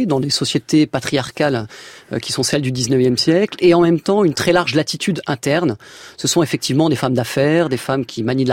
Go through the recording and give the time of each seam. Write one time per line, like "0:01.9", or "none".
none